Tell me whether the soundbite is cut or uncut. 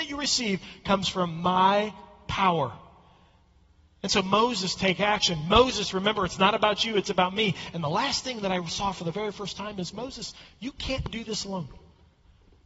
uncut